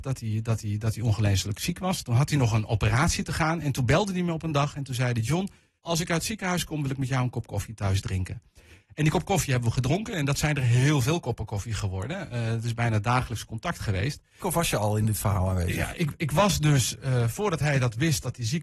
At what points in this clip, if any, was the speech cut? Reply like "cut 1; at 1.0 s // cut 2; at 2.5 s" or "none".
cut 1; at 5.8 s // cut 2; at 14.4 s // cut 3; at 15.9 s

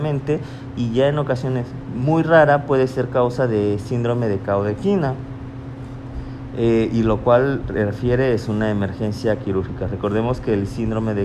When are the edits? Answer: none

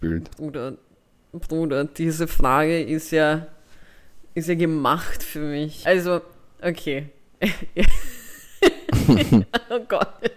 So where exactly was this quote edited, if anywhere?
cut 1; at 5.8 s

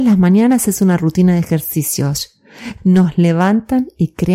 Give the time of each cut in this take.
cut 1; at 2.8 s

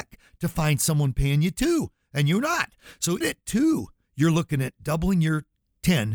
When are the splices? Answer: cut 1; at 3.2 s

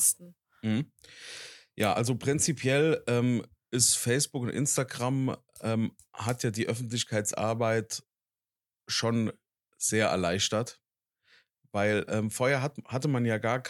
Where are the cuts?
none

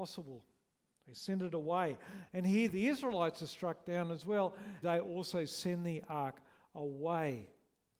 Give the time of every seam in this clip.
cut 1; at 4.8 s

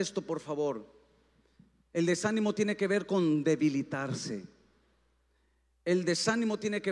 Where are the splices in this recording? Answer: none

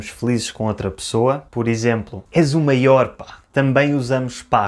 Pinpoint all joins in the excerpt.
cut 1; at 3.5 s

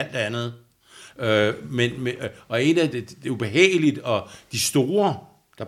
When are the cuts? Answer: cut 1; at 1.1 s // cut 2; at 2.9 s

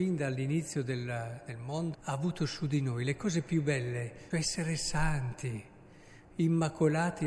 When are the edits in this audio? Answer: cut 1; at 1.9 s // cut 2; at 4.3 s

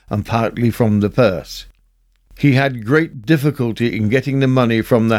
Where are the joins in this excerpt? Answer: none

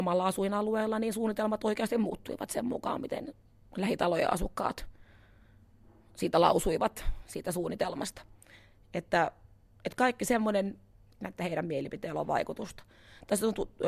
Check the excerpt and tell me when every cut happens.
cut 1; at 11.2 s

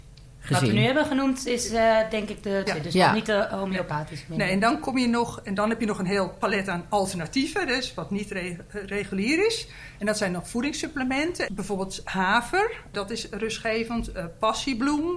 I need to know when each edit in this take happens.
cut 1; at 2.7 s // cut 2; at 11.5 s // cut 3; at 12.9 s

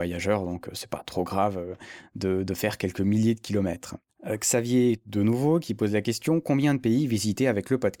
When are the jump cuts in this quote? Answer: none

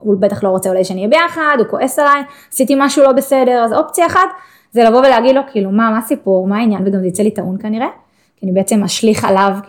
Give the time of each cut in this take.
none

